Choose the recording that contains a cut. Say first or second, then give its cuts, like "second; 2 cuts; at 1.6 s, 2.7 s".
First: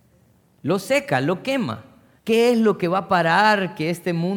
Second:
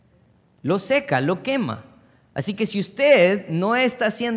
first; 1 cut; at 2.2 s